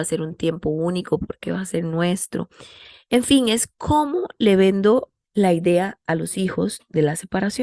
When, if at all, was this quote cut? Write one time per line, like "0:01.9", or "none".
0:05.2